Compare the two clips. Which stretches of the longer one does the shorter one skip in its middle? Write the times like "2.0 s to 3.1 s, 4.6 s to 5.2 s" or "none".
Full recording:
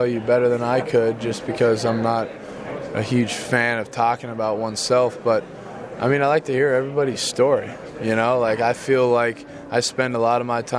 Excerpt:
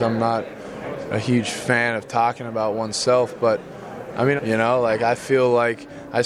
6.2 s to 7.9 s